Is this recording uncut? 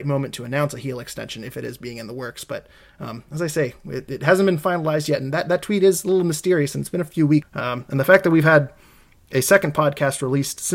no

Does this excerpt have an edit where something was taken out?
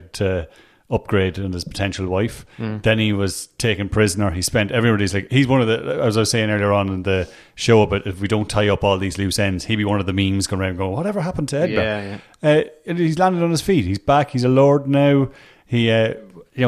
no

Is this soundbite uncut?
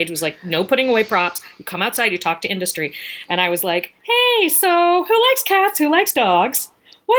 yes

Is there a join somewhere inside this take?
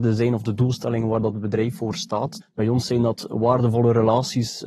yes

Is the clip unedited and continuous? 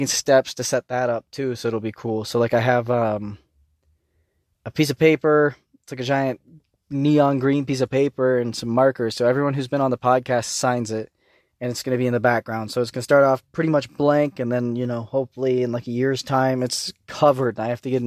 yes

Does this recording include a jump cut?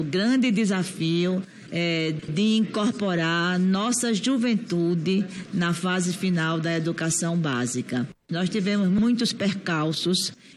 yes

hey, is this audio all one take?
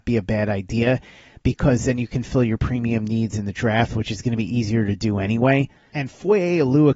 yes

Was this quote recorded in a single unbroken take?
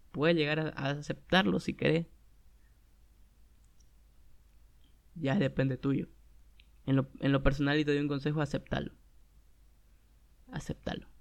yes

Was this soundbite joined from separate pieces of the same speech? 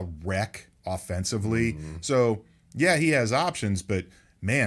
no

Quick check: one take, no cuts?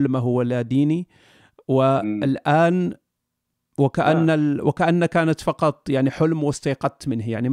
yes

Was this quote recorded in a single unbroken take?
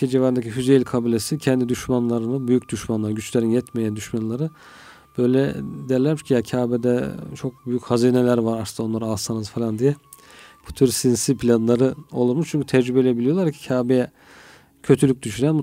no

